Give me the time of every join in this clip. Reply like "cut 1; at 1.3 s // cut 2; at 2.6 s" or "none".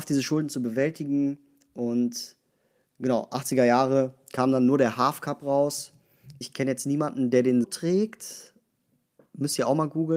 cut 1; at 6.4 s // cut 2; at 7.6 s